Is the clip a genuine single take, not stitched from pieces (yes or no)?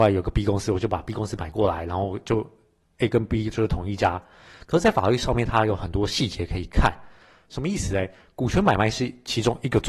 yes